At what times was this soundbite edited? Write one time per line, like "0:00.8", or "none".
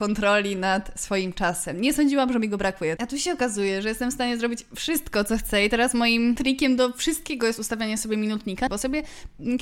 0:03.0
0:08.7